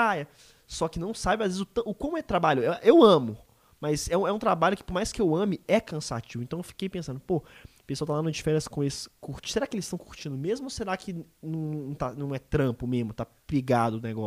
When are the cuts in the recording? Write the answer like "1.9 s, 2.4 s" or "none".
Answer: none